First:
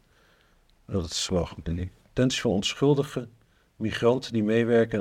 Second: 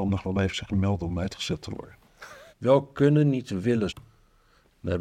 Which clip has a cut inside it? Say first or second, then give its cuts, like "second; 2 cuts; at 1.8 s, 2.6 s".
second; 2 cuts; at 2.5 s, 3.9 s